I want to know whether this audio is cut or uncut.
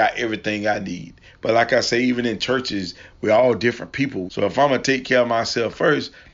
cut